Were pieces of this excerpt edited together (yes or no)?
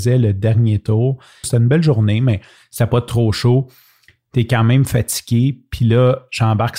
yes